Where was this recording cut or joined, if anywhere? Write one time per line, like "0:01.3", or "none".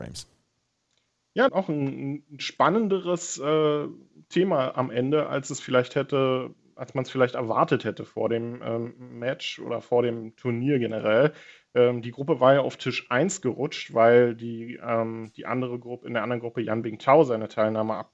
0:01.5

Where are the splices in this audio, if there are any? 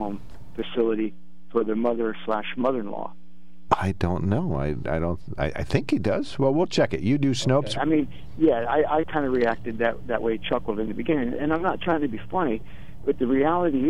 0:03.7
0:07.7

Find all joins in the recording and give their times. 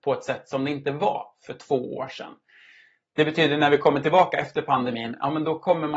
none

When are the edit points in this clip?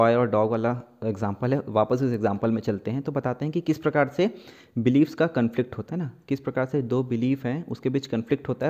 0:05.9

